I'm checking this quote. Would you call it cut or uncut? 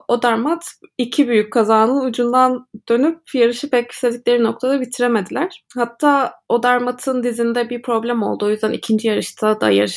cut